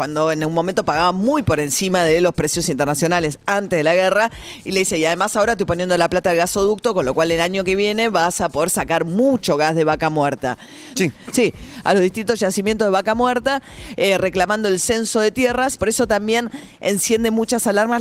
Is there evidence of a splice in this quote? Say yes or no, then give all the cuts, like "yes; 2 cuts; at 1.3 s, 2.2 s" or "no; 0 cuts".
yes; 2 cuts; at 11.0 s, 15.8 s